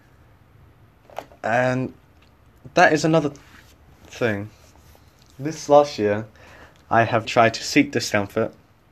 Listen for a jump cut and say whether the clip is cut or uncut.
cut